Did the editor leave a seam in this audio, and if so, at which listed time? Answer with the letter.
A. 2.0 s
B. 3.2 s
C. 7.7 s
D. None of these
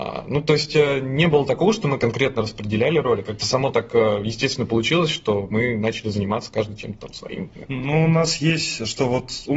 A